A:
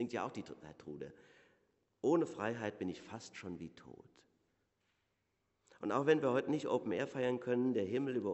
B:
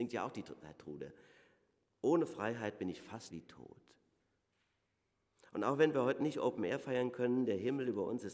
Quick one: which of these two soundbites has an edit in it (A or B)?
B